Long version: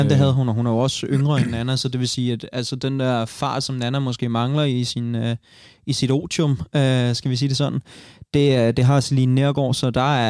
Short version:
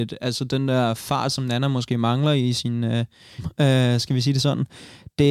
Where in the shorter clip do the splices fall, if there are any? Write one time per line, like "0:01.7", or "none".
0:03.4